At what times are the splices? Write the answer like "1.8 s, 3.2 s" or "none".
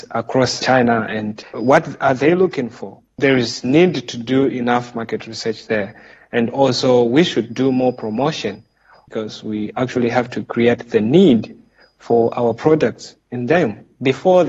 none